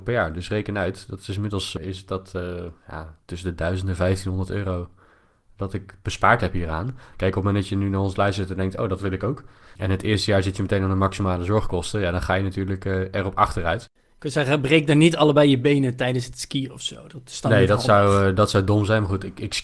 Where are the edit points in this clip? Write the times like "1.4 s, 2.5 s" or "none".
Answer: 7.1 s

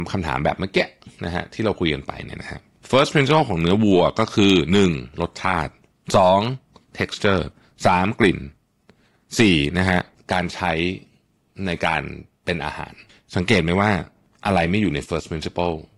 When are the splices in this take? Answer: none

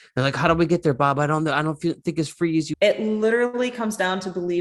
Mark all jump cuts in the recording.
2.7 s

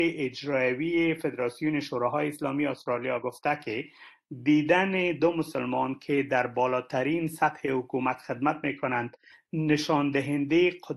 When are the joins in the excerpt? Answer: none

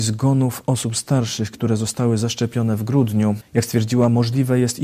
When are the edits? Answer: 3.4 s

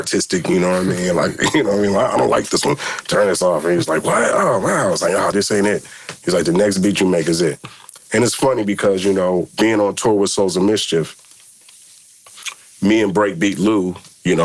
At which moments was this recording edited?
5.3 s

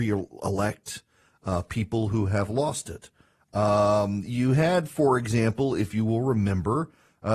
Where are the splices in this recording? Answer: none

